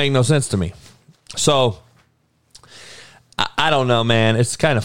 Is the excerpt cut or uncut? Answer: uncut